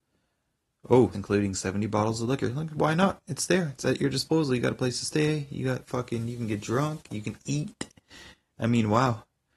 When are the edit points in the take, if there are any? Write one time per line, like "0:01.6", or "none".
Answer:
0:01.1